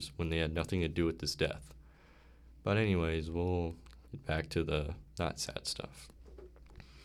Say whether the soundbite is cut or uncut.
cut